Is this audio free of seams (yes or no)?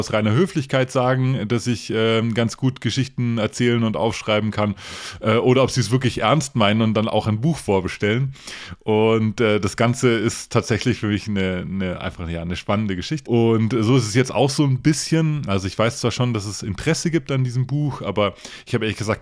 no